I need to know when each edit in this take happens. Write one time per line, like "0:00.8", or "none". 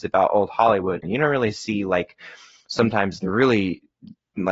0:01.0
0:03.2